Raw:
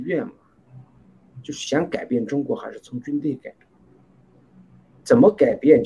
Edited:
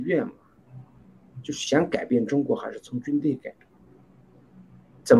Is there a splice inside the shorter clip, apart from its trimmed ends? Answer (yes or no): no